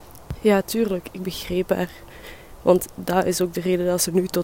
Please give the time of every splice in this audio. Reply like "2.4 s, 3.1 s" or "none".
none